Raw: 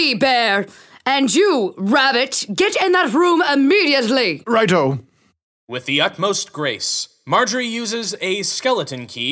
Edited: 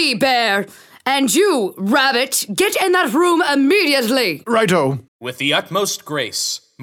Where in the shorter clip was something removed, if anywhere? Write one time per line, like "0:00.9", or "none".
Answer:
0:05.1